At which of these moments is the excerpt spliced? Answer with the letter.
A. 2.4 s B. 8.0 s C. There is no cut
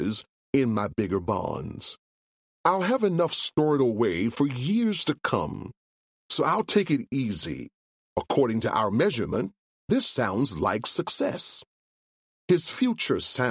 B